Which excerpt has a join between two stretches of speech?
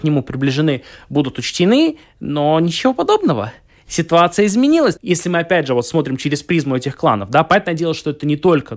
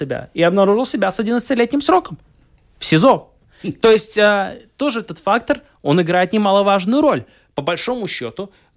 first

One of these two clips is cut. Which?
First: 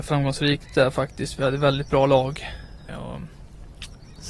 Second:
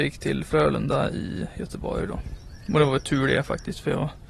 first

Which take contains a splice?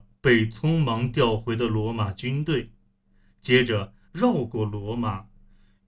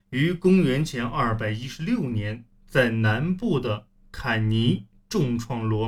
first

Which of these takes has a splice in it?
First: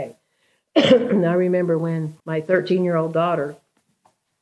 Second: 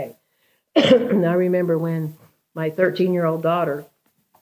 first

